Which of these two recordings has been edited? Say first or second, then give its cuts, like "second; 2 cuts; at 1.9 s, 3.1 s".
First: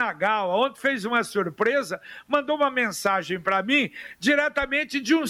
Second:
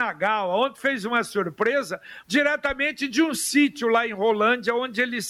second; 1 cut; at 2.2 s